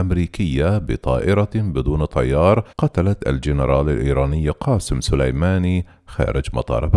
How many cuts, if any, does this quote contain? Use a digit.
1